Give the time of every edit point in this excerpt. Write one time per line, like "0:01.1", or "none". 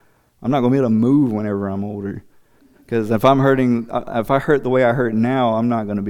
0:02.6